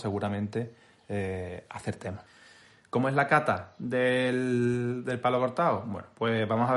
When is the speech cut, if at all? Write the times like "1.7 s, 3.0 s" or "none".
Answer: none